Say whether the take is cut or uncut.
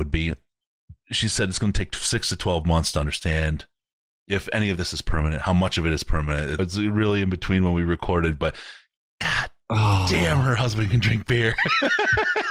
cut